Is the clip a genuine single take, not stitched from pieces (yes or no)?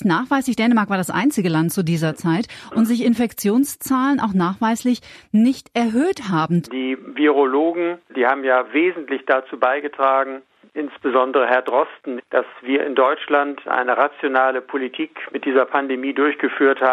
no